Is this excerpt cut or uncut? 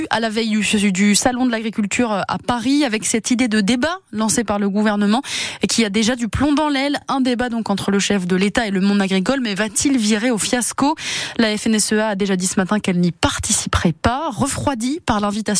uncut